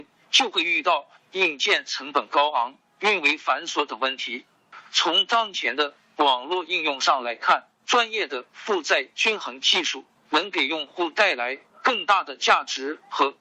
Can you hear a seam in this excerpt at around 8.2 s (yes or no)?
no